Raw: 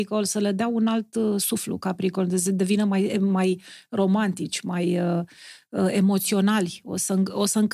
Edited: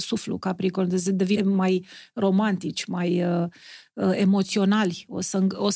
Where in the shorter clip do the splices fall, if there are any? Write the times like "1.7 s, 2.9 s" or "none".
1.4 s

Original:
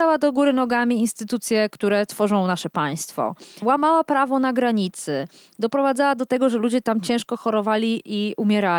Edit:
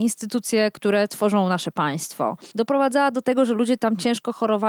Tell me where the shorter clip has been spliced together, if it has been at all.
2.5 s

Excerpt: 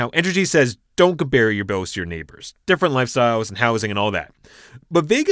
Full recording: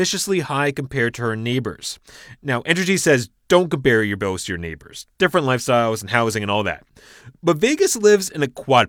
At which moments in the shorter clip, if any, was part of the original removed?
none

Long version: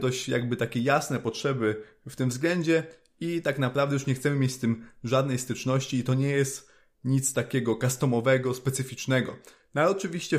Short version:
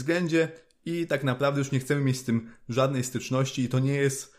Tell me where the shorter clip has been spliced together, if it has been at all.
none

